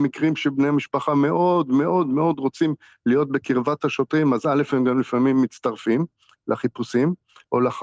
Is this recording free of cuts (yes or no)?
yes